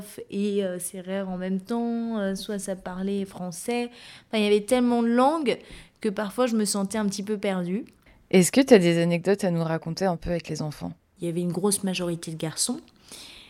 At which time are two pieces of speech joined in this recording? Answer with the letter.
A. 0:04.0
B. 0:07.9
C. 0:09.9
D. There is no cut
D